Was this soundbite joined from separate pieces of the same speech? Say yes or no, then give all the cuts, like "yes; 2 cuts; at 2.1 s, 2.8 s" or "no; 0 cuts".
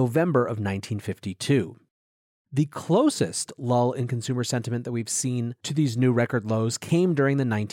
no; 0 cuts